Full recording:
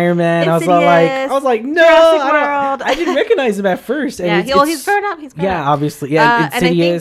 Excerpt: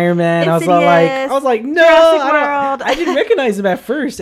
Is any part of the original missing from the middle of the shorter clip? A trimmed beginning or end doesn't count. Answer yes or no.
no